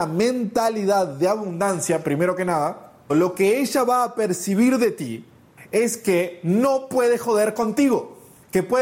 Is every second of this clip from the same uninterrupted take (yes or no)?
no